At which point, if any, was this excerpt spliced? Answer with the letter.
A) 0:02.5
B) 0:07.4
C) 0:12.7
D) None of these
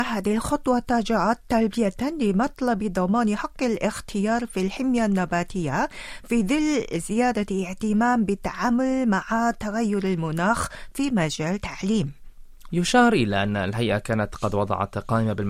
C